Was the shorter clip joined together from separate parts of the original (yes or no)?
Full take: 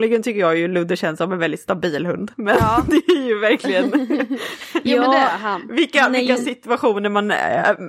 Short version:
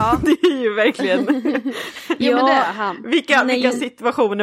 no